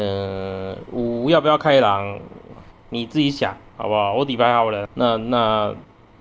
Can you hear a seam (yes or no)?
yes